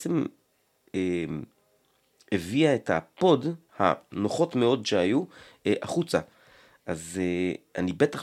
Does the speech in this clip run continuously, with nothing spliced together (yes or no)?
no